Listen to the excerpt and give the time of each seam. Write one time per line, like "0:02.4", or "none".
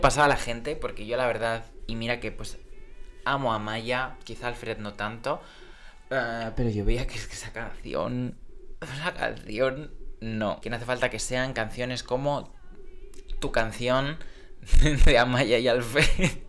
0:06.0
0:10.6